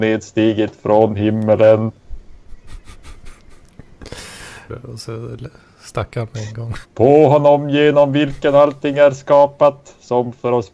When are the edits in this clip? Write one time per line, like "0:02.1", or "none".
0:04.7
0:06.8

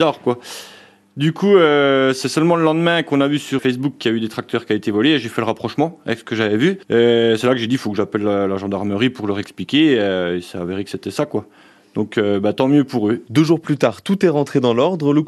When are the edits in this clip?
0:03.6

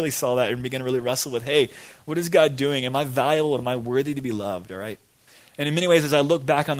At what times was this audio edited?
none

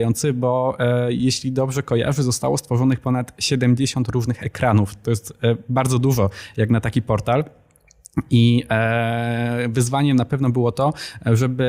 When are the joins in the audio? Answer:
none

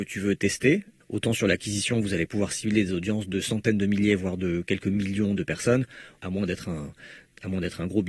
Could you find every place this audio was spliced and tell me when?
0:01.0
0:06.2

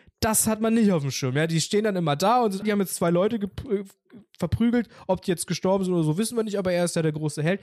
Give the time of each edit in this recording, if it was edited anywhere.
0:02.6

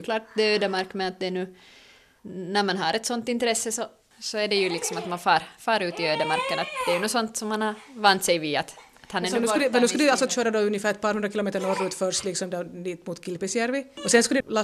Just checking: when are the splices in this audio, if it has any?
none

